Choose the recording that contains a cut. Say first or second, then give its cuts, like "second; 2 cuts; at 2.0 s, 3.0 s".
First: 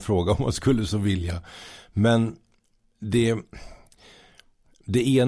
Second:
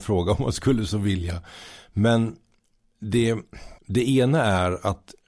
second; 1 cut; at 3.8 s